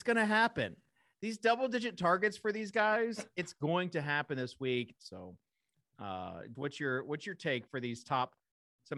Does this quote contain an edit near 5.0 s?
yes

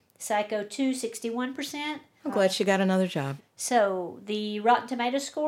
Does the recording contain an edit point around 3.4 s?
yes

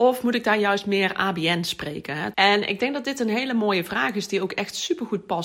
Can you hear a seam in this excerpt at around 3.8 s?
no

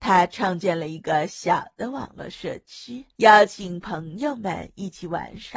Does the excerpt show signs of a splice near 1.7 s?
no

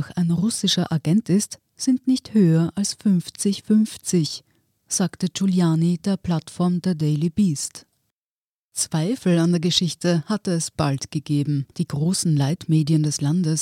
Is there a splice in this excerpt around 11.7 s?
yes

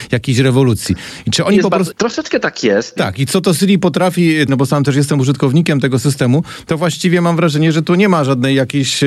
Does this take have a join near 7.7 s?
no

